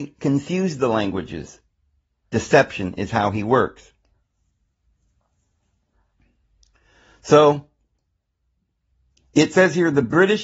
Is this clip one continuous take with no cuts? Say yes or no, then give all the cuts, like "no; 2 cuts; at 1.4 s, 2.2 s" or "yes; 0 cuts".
yes; 0 cuts